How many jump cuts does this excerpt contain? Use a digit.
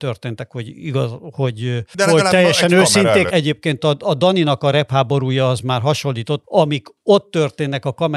2